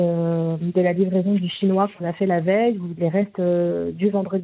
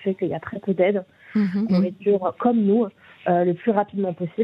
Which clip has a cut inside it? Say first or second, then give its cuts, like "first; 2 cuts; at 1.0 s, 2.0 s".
second; 1 cut; at 1.7 s